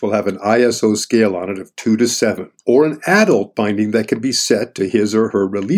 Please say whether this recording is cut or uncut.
cut